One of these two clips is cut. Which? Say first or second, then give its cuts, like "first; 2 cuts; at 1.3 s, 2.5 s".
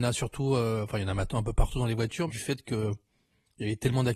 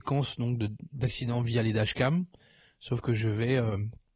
first; 1 cut; at 2.3 s